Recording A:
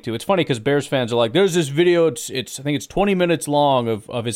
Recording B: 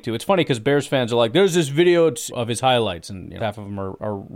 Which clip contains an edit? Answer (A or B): B